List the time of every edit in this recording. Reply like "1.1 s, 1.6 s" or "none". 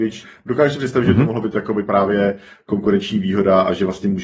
none